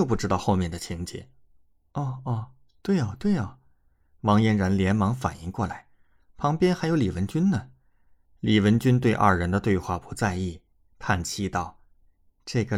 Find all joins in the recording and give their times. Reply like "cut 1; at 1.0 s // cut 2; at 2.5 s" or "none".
none